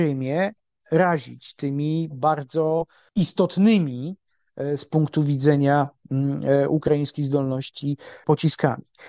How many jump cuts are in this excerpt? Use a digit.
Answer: 1